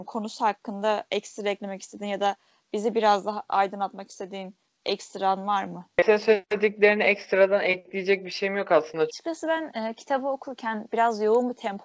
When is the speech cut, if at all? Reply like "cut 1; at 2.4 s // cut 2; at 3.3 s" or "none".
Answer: cut 1; at 9.1 s